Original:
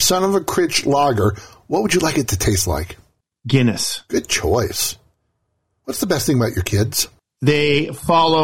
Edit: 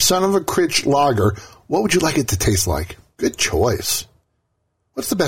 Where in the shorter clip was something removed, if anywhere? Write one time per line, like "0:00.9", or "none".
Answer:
0:03.2